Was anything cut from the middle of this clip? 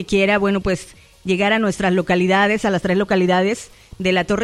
no; 0 cuts

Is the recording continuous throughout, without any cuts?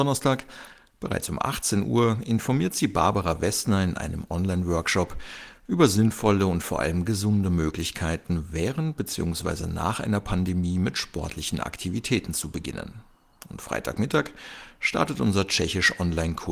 yes; 0 cuts

